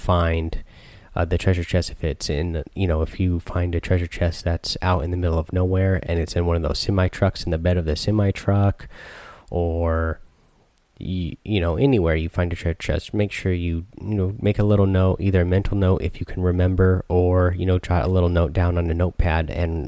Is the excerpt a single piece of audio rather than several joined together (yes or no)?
yes